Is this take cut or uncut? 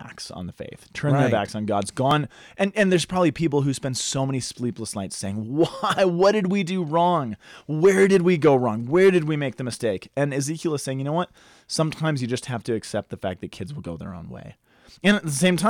uncut